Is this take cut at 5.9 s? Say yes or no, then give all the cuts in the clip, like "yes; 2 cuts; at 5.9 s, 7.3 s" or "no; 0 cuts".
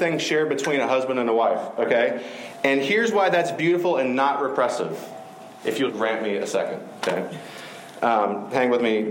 yes; 1 cut; at 5.9 s